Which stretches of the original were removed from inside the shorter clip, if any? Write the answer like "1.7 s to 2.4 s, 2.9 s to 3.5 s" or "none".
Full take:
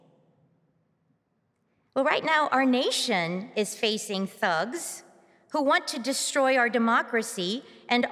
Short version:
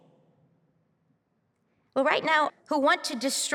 2.5 s to 5.3 s

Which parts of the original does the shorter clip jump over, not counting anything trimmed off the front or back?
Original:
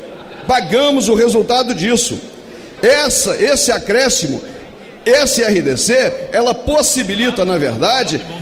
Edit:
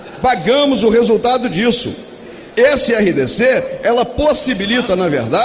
2.8 s to 5.0 s

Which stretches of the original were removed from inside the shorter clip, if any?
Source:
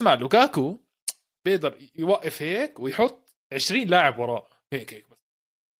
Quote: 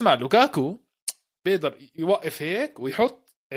none

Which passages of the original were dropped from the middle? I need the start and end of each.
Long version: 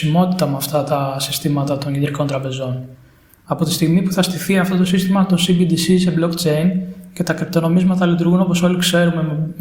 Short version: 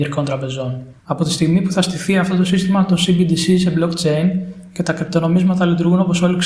3.0 s to 3.4 s

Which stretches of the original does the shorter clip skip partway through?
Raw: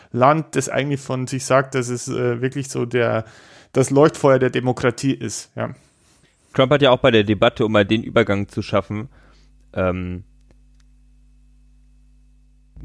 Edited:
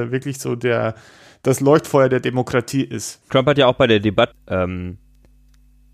5.5 s to 6.5 s, 7.6 s to 9.6 s

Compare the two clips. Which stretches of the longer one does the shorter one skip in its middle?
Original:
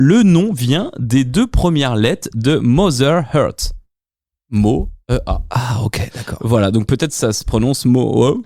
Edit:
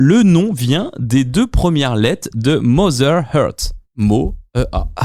3.9 s to 4.4 s

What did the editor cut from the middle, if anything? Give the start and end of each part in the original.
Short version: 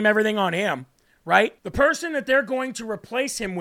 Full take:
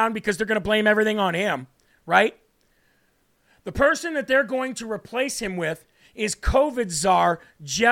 2.4 s to 3.6 s

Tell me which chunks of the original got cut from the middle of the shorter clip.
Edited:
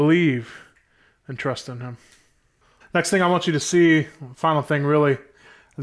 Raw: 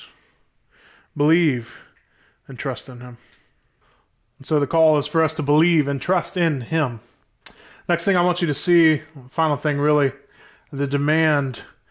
4.0 s to 7.7 s

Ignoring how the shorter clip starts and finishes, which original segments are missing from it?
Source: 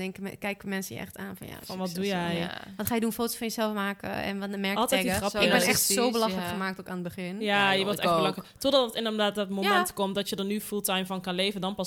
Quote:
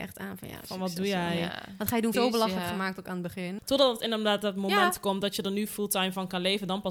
3.1 s to 6.0 s, 7.4 s to 8.5 s

